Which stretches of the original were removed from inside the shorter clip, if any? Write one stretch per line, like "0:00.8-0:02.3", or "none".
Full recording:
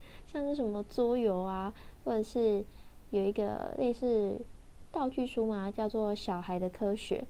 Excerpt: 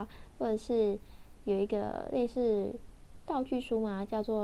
none